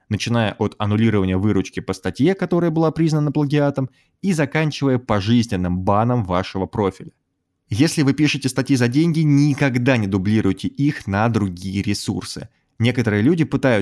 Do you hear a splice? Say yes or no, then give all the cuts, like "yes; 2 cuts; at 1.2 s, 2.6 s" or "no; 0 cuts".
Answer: no; 0 cuts